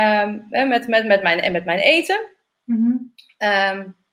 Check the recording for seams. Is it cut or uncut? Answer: uncut